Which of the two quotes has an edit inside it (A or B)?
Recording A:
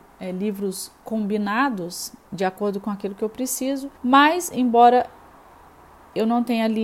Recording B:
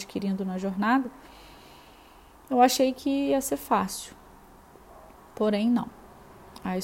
A